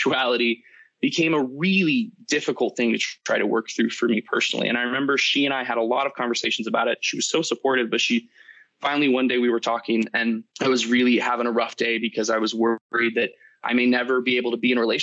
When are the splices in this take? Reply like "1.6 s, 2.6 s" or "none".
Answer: 10.5 s